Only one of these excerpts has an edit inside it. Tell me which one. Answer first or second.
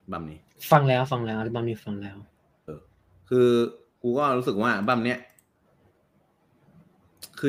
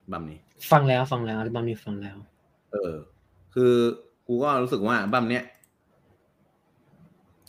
first